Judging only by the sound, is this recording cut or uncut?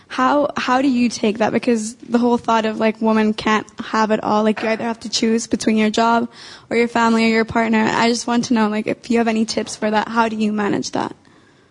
uncut